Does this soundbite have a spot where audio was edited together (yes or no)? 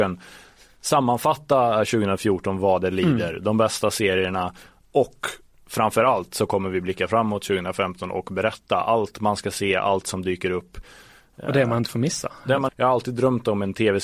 yes